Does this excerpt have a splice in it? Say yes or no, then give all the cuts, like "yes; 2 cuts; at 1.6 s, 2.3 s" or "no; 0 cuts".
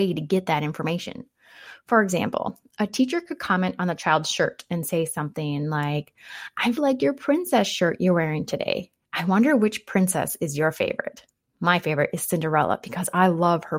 yes; 1 cut; at 6.8 s